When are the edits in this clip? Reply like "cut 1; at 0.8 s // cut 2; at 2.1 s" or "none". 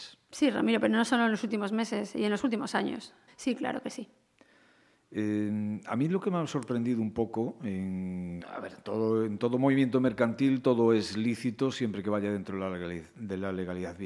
cut 1; at 3.3 s // cut 2; at 8.4 s